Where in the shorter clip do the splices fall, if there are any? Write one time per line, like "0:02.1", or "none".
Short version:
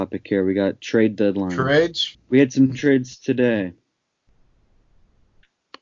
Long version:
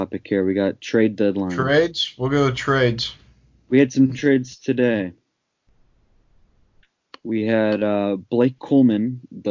0:02.1